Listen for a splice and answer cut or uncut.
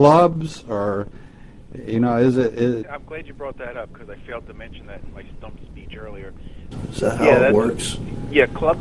cut